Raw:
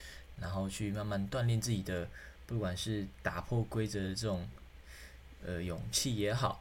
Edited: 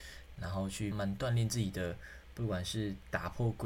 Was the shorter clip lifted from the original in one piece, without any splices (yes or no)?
no